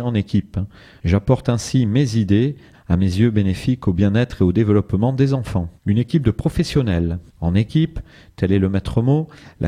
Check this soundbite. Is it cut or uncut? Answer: cut